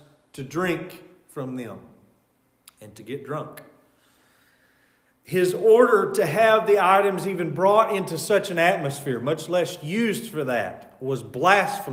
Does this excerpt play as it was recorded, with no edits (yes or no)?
yes